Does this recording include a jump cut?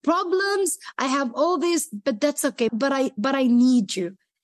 yes; 1 cut; at 2.7 s

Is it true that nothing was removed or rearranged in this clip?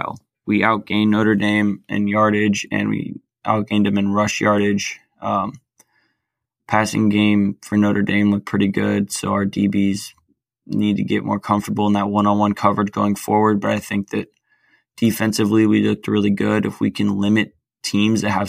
yes; 0 cuts

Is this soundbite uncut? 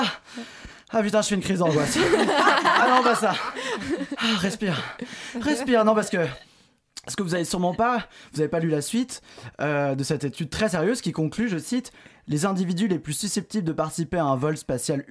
yes; 0 cuts

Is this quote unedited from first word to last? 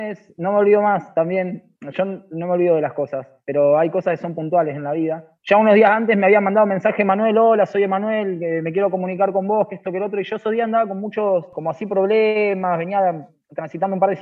yes; 0 cuts

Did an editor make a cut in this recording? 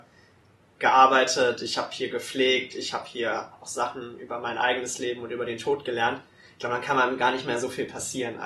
no; 0 cuts

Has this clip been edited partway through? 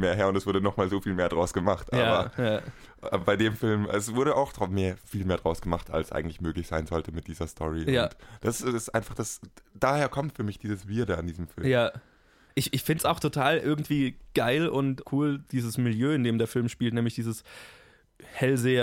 no; 0 cuts

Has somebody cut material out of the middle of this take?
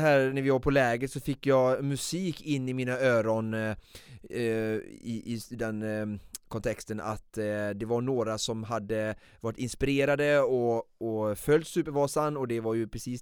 no; 0 cuts

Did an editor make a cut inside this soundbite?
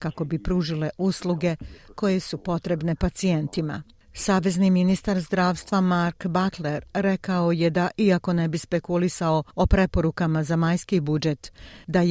no; 0 cuts

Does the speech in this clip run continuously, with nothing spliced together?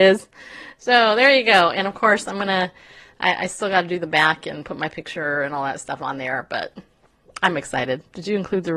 yes; 0 cuts

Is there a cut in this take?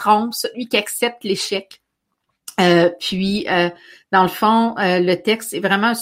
no; 0 cuts

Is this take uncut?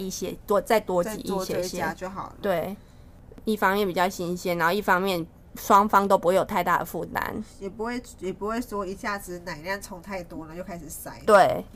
yes; 0 cuts

